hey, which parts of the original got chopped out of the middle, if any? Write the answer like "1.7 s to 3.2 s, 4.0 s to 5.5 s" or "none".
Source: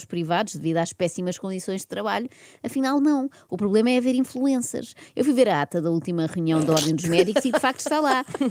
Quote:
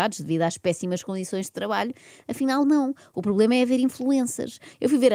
none